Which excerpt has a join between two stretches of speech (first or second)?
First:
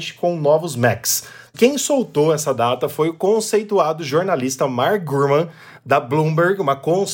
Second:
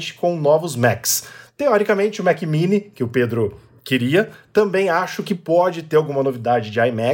first